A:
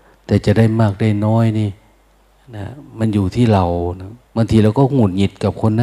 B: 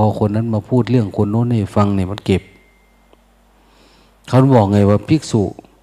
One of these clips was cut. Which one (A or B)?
A